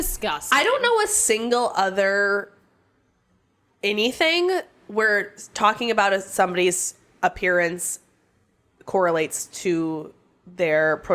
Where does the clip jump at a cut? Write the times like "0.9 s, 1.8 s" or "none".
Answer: none